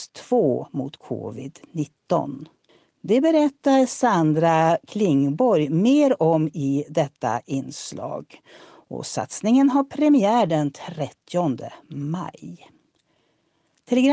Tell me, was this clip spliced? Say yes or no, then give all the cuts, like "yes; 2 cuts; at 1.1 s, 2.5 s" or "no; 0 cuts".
yes; 1 cut; at 2.9 s